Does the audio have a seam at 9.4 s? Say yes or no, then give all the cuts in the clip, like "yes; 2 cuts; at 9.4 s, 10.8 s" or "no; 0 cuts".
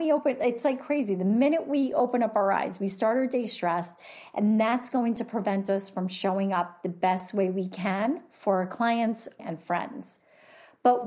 yes; 1 cut; at 9.4 s